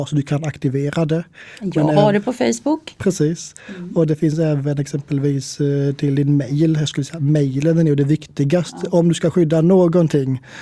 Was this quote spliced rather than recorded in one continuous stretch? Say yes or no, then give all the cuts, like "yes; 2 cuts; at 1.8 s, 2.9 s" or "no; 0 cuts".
no; 0 cuts